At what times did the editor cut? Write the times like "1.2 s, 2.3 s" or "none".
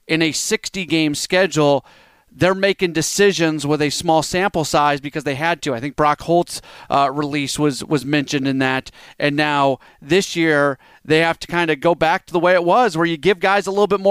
none